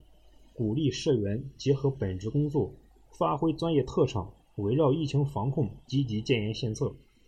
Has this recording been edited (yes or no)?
no